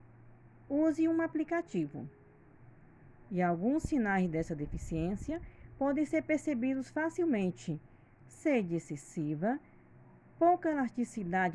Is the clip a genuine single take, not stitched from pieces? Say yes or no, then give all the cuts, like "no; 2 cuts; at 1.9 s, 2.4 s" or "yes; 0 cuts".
no; 2 cuts; at 3.2 s, 8.2 s